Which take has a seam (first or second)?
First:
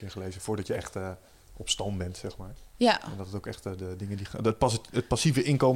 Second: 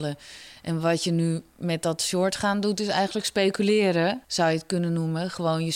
second